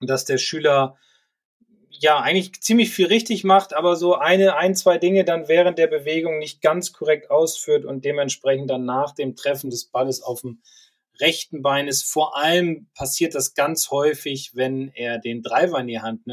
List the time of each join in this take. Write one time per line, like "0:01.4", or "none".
none